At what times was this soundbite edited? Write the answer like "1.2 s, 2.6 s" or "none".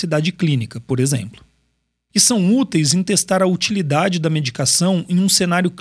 2.1 s

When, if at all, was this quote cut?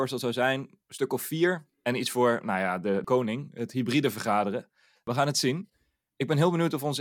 1.7 s

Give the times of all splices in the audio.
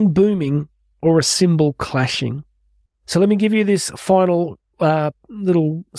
2.9 s

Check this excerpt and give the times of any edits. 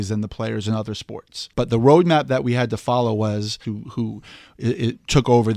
1.5 s, 3.6 s

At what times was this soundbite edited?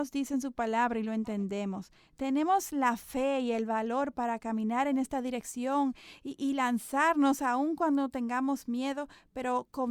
none

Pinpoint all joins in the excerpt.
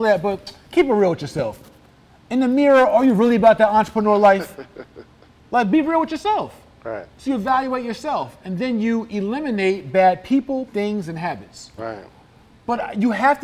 10.7 s, 11.8 s

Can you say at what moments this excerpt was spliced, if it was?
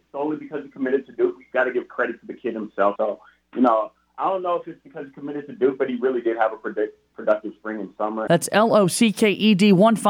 3.0 s, 8.3 s

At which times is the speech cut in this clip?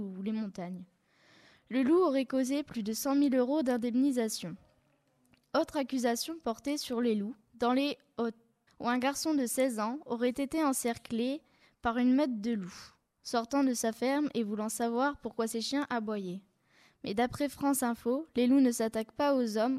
8.7 s

